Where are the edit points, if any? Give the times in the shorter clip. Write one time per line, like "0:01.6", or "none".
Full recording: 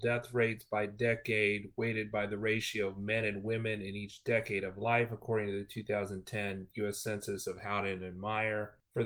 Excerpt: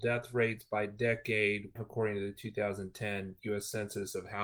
0:01.8